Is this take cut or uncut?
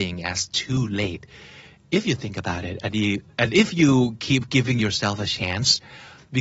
uncut